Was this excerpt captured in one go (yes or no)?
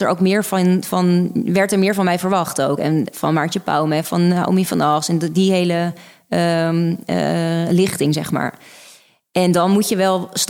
yes